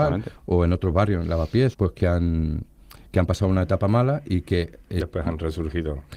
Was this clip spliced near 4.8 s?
no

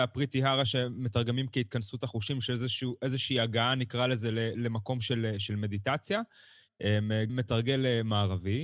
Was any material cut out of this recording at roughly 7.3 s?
yes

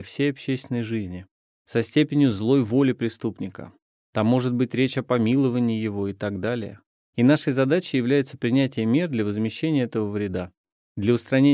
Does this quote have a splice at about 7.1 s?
yes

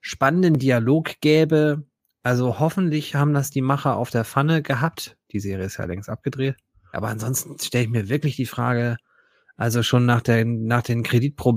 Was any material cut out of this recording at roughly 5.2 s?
no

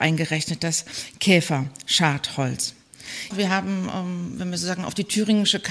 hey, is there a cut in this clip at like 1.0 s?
no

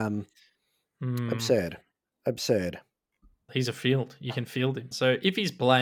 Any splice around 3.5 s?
yes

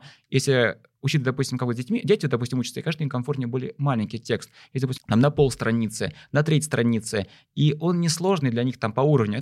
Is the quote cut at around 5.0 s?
yes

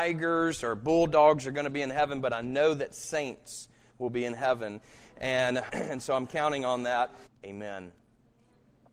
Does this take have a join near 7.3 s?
yes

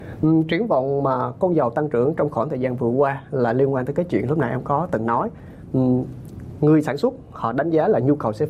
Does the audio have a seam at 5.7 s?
no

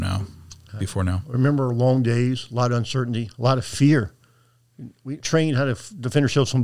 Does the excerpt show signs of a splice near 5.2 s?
yes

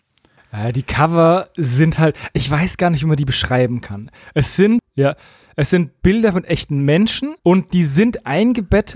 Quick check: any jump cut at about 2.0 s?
no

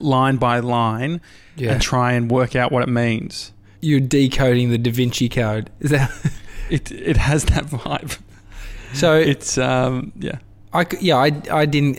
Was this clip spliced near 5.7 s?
no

